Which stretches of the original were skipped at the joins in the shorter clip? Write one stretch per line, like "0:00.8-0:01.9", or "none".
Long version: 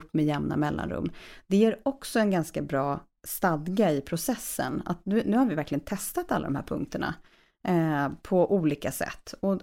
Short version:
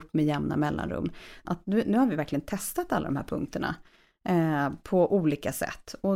0:01.4-0:04.8